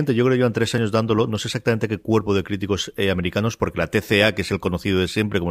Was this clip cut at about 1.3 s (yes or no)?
no